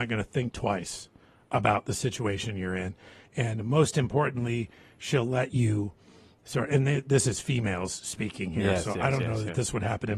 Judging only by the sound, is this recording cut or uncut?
uncut